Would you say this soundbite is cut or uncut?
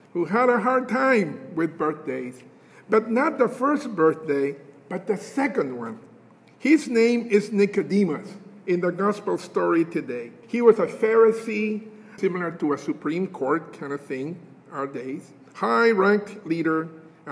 cut